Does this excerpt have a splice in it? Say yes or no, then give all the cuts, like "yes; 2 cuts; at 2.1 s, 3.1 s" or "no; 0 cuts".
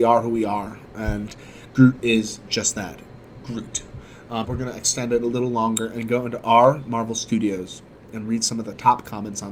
yes; 1 cut; at 4.4 s